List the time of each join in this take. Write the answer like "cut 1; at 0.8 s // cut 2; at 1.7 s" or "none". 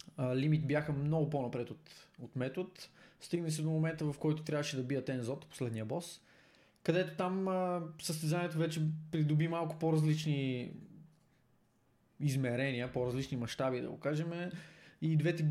none